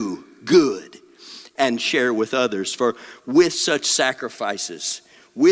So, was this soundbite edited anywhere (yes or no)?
no